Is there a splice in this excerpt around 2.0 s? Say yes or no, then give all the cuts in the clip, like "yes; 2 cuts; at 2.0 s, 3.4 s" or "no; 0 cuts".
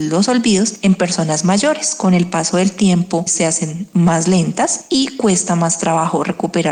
no; 1 cut; at 3.3 s